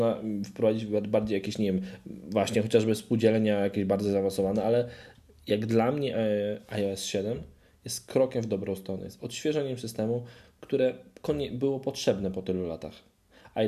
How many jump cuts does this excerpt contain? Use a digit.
0